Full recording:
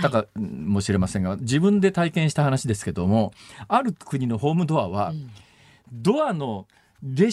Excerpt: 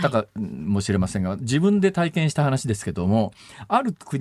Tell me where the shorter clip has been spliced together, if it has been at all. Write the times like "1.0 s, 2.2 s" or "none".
none